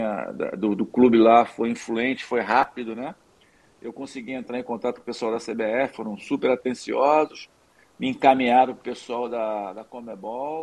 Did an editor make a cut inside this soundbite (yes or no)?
no